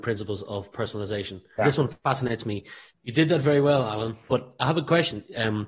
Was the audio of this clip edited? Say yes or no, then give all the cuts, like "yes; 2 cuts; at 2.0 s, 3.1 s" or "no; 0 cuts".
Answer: yes; 3 cuts; at 1.6 s, 2.9 s, 4.3 s